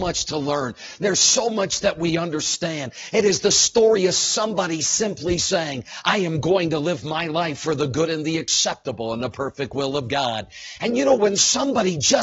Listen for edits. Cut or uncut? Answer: uncut